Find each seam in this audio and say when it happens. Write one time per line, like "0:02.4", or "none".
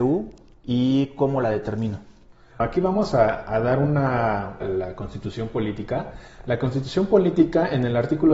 0:04.6